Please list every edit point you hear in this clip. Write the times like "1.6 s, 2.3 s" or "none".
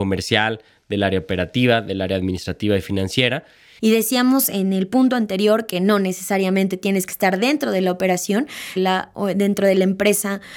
3.8 s, 8.8 s